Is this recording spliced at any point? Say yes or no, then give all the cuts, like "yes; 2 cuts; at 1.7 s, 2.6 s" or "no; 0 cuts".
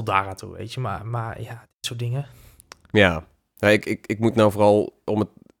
no; 0 cuts